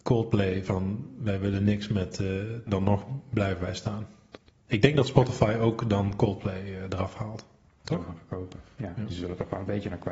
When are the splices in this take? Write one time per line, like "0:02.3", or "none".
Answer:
0:02.7